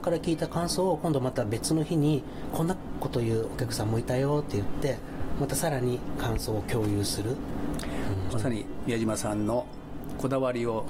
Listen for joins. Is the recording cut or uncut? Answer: cut